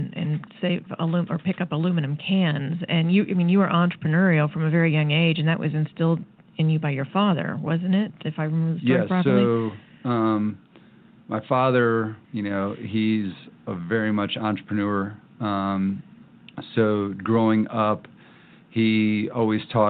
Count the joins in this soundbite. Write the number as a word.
one